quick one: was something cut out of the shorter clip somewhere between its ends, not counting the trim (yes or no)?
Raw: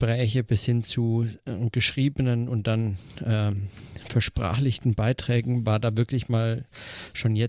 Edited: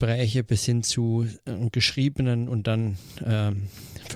no